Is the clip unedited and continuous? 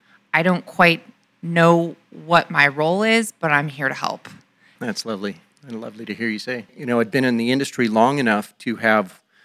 no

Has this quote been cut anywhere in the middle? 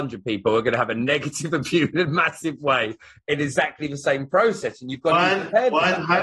no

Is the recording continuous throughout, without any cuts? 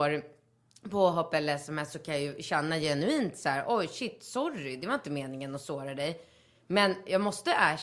yes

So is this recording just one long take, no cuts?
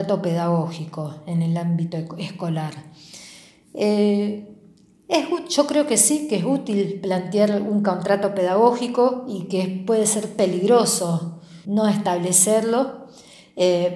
no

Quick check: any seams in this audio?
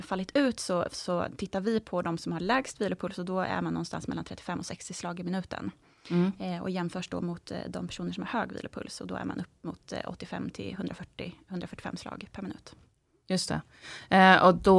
no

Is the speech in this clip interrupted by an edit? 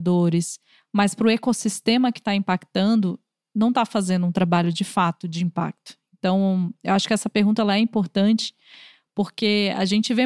no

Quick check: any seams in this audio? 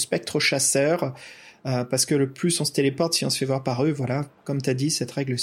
no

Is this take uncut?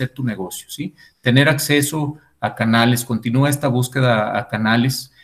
yes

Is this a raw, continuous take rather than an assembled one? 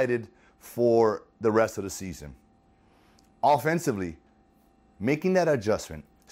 yes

